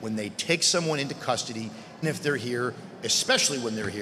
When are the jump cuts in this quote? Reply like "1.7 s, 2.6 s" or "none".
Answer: 2.0 s